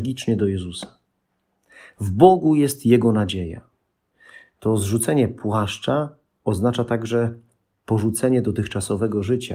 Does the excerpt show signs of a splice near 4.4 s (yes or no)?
no